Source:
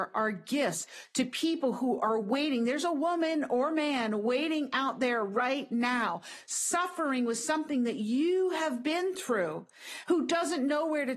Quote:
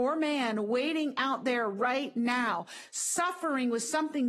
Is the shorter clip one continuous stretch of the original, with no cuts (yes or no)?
yes